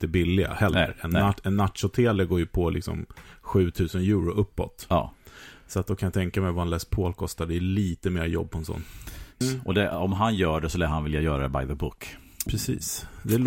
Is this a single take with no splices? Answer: no; 2 cuts; at 9.4 s, 12.5 s

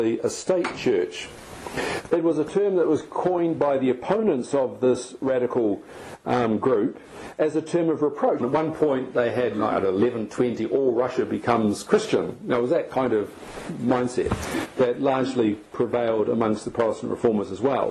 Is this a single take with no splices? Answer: no; 2 cuts; at 2.1 s, 8.4 s

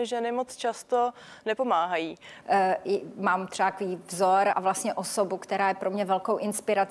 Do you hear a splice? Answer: yes; 2 cuts; at 2.4 s, 4.5 s

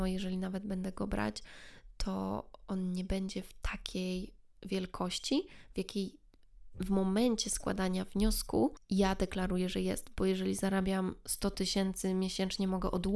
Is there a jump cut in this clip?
no; 0 cuts

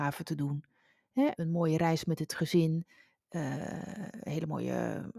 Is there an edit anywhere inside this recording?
yes; 1 cut; at 1.3 s

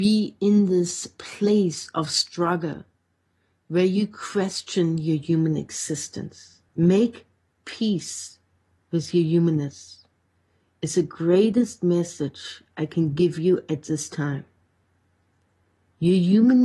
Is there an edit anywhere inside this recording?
yes; 1 cut; at 6.7 s

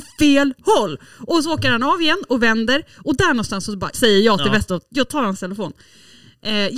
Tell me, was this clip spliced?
yes; 1 cut; at 3.9 s

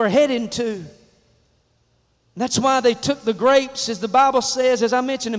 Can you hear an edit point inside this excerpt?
no; 0 cuts

